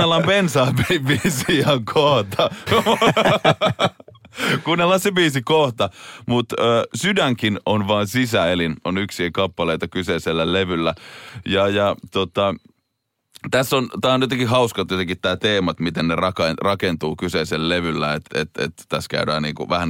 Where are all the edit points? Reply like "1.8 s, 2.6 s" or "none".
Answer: 2.7 s, 18.3 s